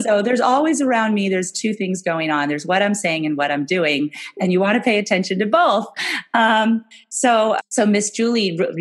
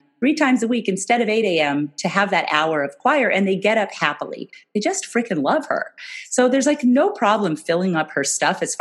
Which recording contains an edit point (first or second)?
first